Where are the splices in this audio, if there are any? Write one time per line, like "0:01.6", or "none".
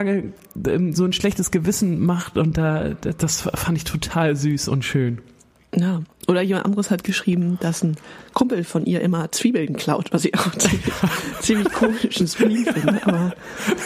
none